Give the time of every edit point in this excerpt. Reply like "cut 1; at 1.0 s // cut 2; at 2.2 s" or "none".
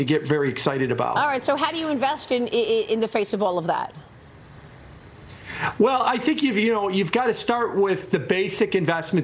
none